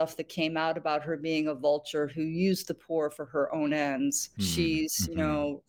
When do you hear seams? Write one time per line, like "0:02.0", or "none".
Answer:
0:04.4